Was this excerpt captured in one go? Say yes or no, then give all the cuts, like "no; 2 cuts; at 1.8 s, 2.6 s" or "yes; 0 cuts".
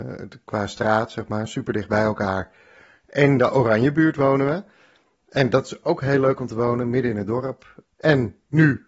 no; 1 cut; at 7.8 s